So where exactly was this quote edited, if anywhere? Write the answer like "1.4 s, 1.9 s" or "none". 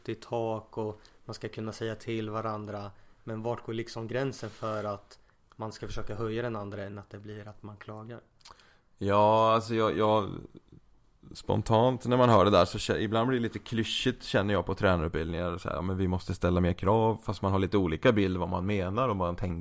none